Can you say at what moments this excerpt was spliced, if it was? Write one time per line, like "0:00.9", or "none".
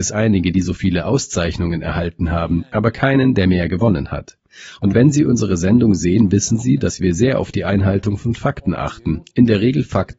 none